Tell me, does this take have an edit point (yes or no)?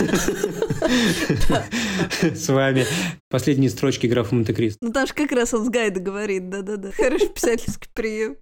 yes